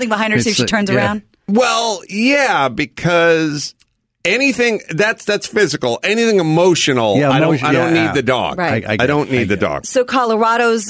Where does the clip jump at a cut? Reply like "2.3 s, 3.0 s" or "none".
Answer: none